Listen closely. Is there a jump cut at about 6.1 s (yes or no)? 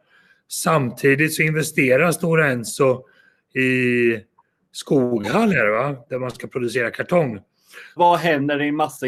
no